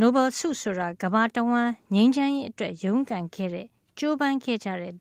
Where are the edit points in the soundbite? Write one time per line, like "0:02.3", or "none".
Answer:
0:01.0